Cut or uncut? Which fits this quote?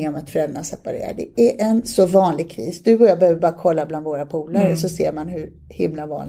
uncut